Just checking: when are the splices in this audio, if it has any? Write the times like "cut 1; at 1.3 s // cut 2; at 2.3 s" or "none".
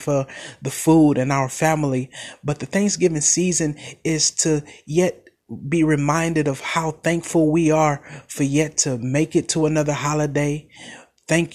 none